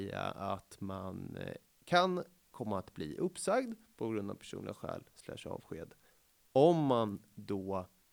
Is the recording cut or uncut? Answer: uncut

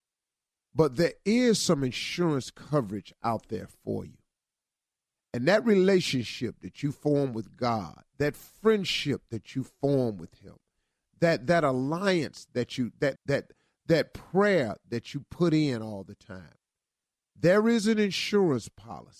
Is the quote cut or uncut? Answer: cut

